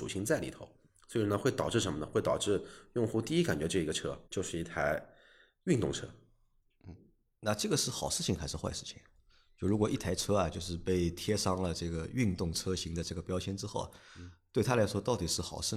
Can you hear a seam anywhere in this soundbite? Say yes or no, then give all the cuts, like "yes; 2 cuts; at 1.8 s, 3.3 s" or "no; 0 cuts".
yes; 1 cut; at 4.2 s